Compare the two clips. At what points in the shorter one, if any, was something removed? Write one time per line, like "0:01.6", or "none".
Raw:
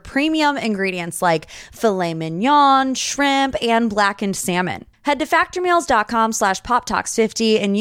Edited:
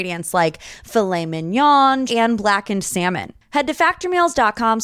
0:02.1